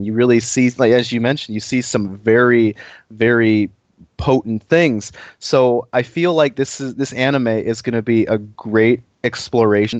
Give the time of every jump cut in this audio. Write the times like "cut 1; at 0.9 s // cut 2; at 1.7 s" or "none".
none